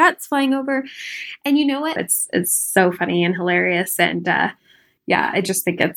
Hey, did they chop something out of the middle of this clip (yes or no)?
yes